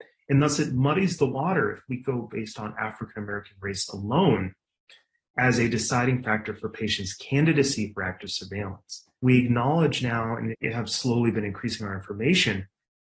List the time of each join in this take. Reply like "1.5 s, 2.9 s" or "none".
9.2 s, 10.5 s